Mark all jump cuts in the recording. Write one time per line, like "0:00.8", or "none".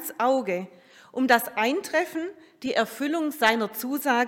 none